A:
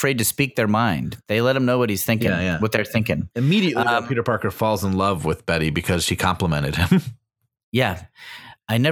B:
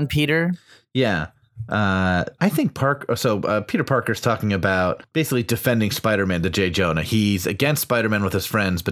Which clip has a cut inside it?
B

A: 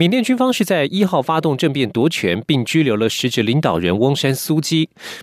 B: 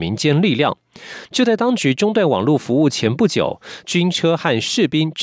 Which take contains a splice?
B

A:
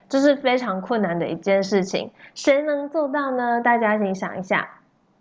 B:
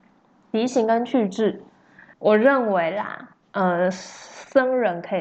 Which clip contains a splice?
B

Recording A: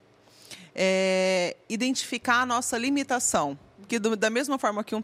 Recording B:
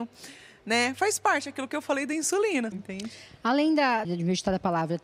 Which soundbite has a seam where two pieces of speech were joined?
B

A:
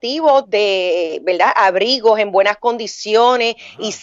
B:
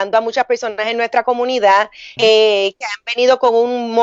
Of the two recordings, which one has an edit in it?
B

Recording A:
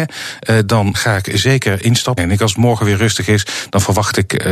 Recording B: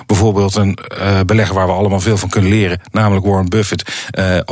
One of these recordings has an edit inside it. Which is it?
A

